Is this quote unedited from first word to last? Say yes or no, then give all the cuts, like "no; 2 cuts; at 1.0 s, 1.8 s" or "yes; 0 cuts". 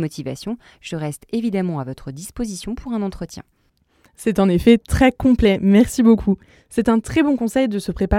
yes; 0 cuts